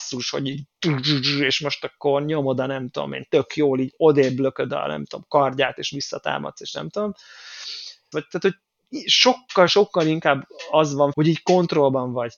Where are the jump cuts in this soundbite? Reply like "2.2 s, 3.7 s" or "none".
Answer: 8.1 s, 9.7 s, 11.1 s